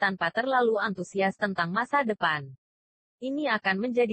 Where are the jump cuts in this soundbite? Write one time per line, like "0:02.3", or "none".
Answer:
none